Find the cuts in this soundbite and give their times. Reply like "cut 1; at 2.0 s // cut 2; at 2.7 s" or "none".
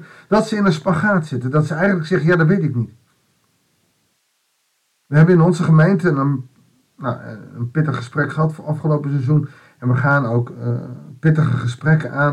none